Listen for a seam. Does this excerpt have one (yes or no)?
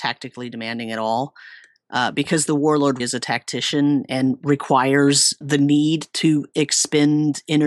yes